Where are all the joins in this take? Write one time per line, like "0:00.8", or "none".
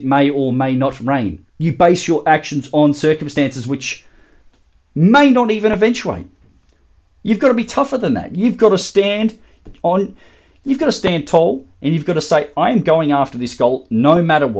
0:01.5